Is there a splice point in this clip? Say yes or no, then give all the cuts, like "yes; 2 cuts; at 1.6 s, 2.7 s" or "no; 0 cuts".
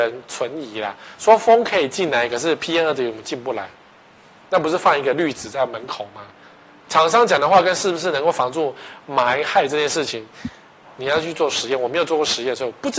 yes; 1 cut; at 6.8 s